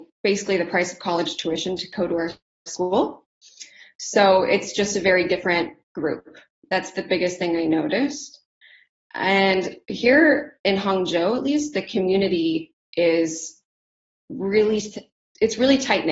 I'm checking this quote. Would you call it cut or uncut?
uncut